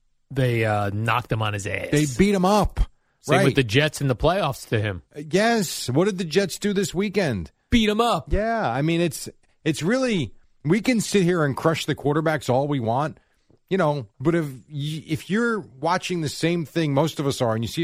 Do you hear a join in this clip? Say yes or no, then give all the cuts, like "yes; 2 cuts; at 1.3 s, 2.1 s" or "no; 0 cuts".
yes; 1 cut; at 14.1 s